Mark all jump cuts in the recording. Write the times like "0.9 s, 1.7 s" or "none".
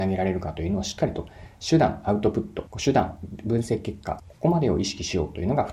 2.7 s, 4.2 s